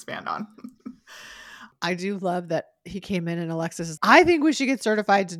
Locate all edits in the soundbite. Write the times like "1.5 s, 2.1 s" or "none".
1.7 s, 4.0 s